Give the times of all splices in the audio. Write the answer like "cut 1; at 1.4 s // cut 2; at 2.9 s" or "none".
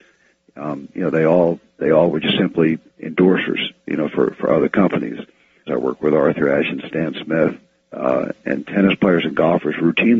cut 1; at 5.7 s